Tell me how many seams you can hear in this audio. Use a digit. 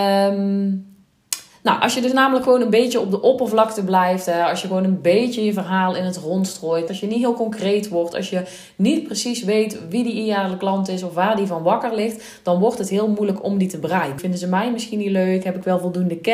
2